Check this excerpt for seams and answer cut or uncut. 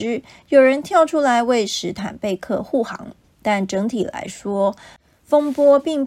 uncut